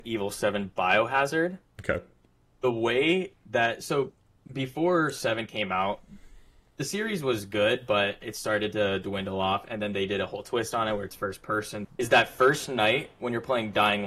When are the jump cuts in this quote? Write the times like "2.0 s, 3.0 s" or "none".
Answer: 11.8 s